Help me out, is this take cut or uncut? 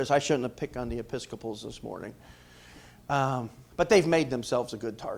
uncut